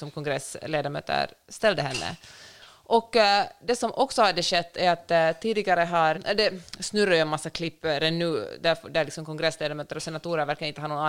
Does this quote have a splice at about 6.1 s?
yes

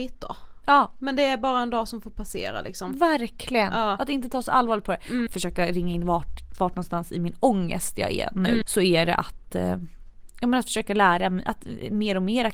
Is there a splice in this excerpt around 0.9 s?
no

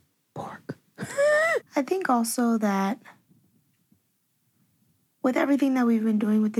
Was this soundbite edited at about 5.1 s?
no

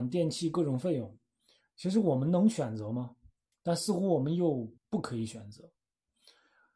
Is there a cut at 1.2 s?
no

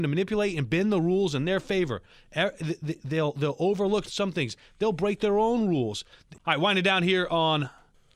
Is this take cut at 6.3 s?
yes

